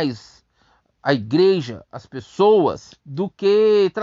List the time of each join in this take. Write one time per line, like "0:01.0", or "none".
0:03.0